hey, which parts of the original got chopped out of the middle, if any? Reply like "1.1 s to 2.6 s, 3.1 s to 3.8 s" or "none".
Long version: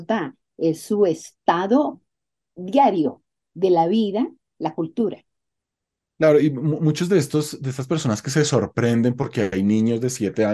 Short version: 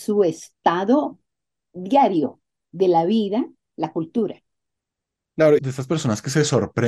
6.4 s to 7.6 s